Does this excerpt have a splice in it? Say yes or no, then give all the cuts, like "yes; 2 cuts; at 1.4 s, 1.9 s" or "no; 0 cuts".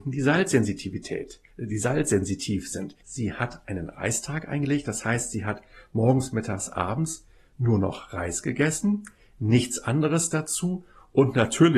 yes; 1 cut; at 3.0 s